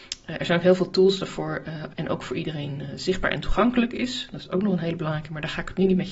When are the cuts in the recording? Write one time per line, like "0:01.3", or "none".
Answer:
0:01.9